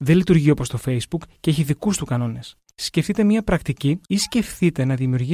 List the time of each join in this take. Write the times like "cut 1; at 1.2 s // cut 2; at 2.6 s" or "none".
cut 1; at 2.7 s // cut 2; at 4.1 s

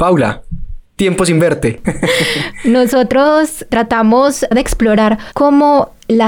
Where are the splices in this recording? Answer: cut 1; at 1.8 s

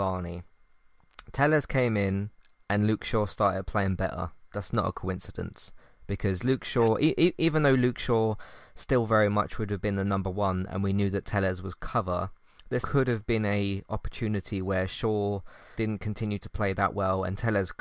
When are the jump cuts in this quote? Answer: cut 1; at 12.8 s // cut 2; at 15.8 s

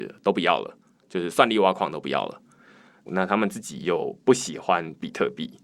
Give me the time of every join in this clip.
cut 1; at 3.1 s

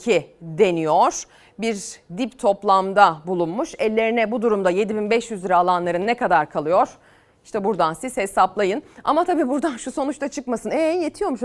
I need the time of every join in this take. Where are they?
none

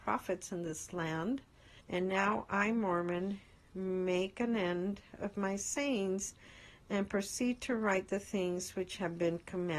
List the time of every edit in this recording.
cut 1; at 1.8 s

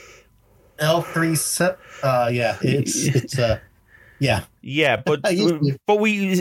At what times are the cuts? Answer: none

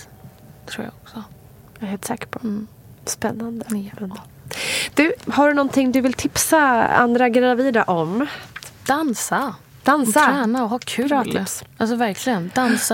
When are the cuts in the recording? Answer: cut 1; at 5.3 s

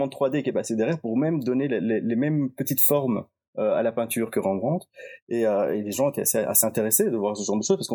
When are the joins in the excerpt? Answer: none

